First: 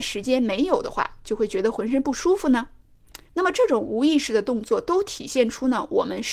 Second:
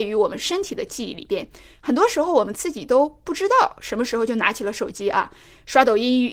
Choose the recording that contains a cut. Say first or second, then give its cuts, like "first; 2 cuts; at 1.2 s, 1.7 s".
first; 1 cut; at 3.3 s